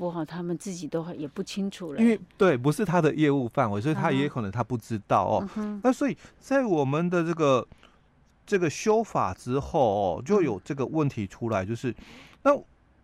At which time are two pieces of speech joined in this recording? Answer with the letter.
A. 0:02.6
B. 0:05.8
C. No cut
C